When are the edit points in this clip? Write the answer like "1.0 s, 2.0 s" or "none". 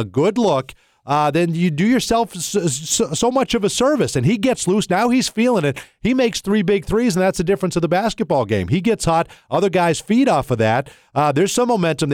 none